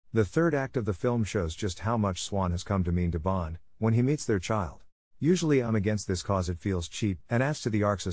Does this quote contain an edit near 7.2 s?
yes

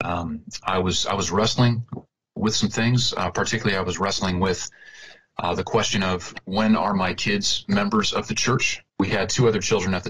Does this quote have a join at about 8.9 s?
yes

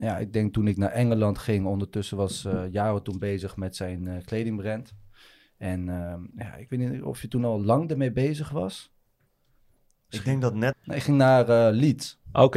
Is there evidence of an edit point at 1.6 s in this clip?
no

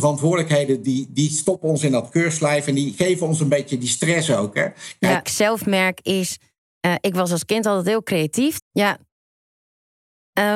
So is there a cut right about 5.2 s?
yes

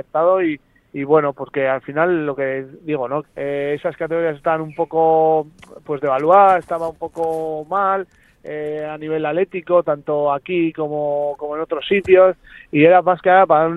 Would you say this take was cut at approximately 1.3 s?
no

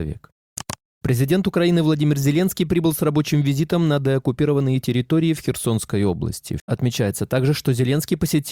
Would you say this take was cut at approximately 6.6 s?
yes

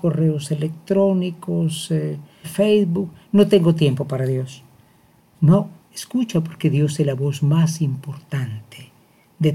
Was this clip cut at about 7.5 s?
no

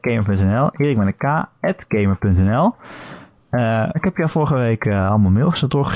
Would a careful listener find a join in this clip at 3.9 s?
yes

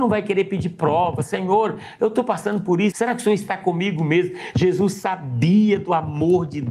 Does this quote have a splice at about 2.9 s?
yes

